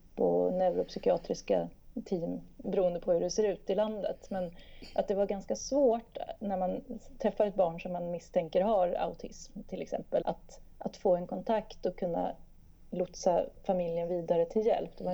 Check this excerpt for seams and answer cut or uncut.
cut